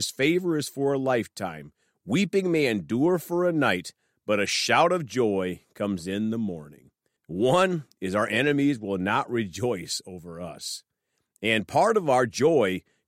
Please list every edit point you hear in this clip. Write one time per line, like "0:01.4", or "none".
0:07.2